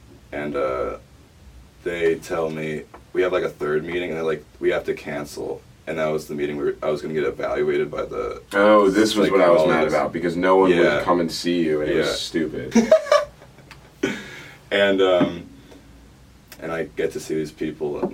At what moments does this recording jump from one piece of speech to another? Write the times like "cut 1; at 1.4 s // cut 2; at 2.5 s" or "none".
cut 1; at 12.7 s // cut 2; at 16.6 s